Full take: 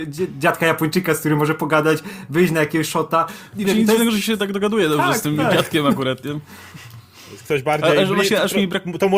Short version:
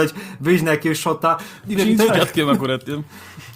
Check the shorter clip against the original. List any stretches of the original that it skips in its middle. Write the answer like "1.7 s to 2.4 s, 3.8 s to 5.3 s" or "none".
4.0 s to 5.5 s